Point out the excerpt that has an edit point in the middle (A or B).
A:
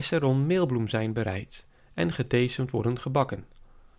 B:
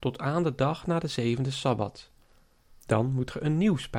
B